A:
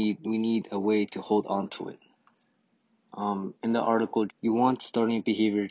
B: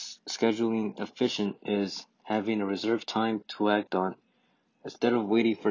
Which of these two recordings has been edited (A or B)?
A